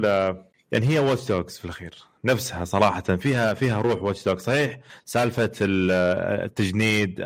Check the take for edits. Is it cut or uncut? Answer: uncut